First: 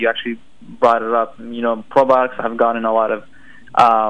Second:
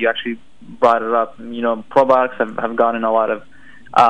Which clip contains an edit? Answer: first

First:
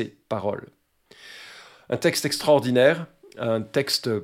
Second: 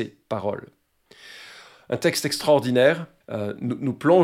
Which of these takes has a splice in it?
second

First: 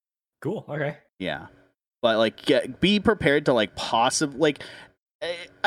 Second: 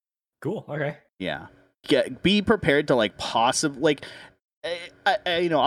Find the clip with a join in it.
second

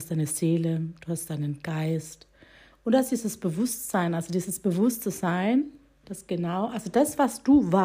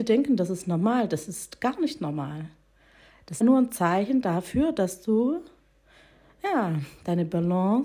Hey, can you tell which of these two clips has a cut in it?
second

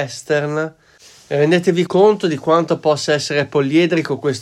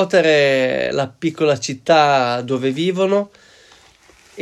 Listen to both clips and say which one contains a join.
first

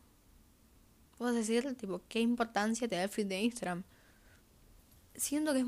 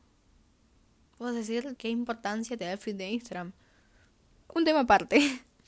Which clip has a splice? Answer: second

